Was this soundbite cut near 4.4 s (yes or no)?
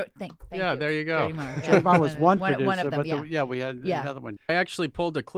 yes